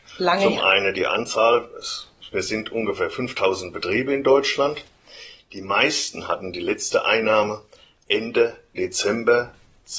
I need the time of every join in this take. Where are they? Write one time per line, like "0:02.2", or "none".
none